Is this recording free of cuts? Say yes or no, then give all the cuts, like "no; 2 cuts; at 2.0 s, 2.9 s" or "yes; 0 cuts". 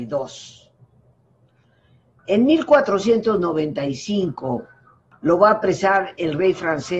no; 1 cut; at 2.2 s